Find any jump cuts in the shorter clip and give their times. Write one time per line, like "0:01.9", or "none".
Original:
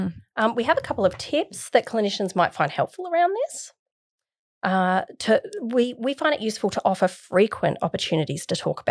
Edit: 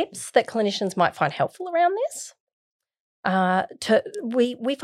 none